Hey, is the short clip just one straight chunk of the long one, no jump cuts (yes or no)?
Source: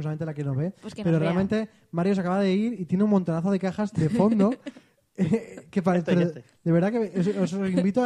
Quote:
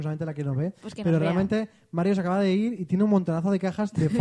yes